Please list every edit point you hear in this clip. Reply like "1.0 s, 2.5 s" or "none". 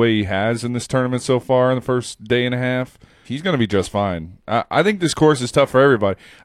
3.2 s